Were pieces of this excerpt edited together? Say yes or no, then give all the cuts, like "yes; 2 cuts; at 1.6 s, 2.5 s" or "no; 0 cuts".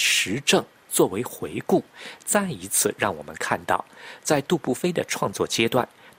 no; 0 cuts